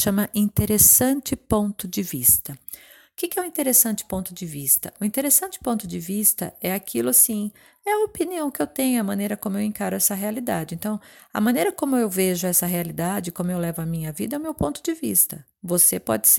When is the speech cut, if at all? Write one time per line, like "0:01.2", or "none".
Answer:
none